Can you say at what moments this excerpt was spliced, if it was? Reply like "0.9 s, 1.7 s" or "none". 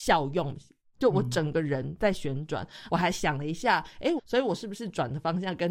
0.9 s, 2.9 s, 4.2 s